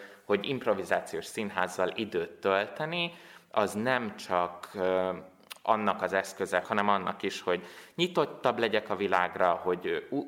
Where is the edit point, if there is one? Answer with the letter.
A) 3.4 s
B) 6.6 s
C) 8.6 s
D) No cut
B